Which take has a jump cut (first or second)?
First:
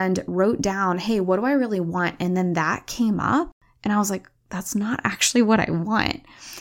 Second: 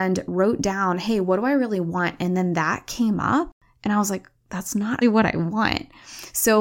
second